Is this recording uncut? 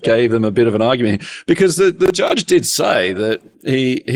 yes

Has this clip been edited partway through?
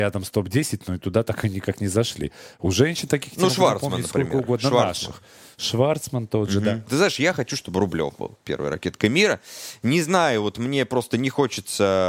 no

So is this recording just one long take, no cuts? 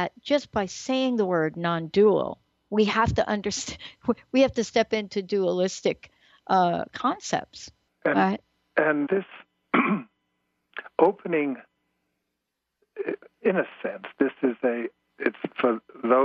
no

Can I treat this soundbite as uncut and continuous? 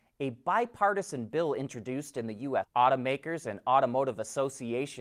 no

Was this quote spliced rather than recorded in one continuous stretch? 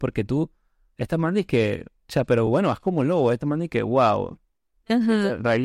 no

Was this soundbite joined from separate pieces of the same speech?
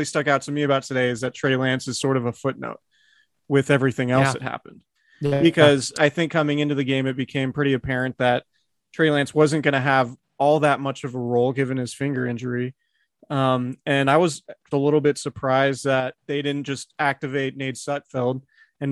yes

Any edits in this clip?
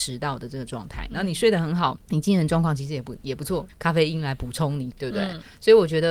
yes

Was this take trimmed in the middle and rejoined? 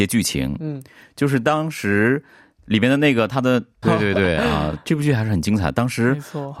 yes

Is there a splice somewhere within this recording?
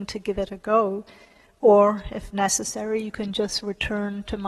no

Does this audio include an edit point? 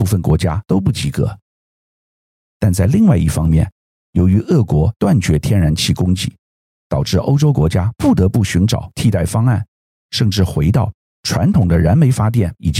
yes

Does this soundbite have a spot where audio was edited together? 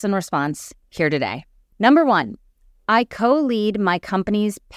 yes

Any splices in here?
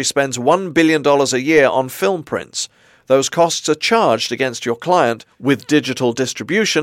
no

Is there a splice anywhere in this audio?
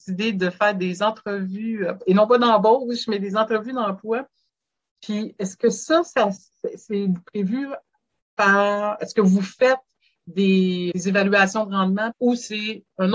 yes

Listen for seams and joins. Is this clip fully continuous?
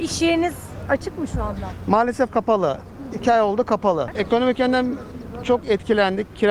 no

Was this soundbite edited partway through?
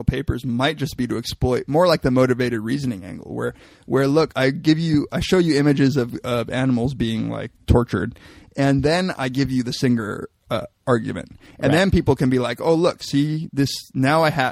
yes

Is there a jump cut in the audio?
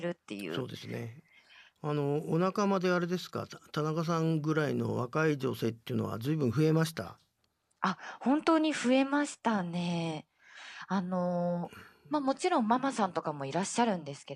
yes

